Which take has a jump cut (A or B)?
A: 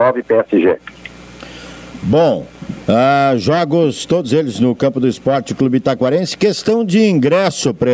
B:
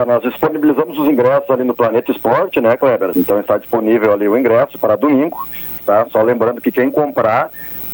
B